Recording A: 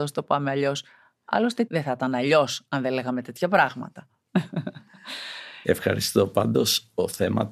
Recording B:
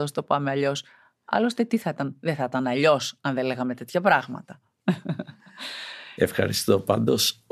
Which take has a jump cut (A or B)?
A